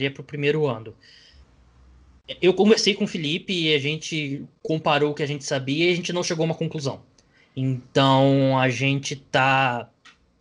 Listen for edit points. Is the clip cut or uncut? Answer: uncut